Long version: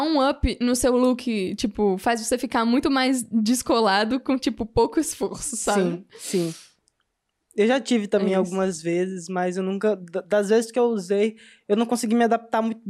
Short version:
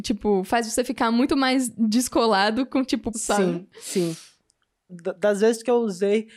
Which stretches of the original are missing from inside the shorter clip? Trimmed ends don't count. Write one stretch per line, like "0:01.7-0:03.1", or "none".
0:04.7-0:05.5
0:07.3-0:10.0